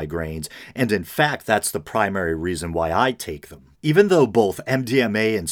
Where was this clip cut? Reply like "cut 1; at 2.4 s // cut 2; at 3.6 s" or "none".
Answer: cut 1; at 3.7 s